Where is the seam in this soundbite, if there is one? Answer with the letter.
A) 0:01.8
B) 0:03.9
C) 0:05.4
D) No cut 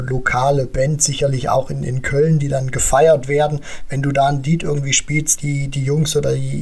C